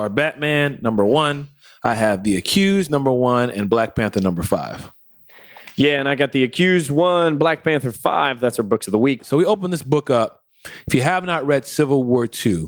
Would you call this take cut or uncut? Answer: cut